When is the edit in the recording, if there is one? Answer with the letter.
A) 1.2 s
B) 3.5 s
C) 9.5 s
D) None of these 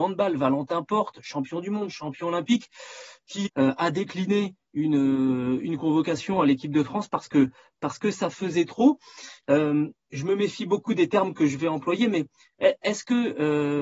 B